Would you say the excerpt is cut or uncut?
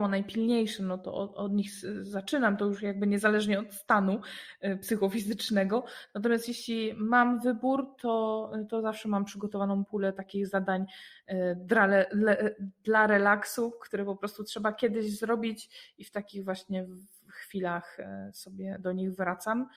uncut